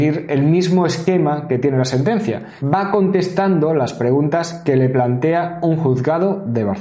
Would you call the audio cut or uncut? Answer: cut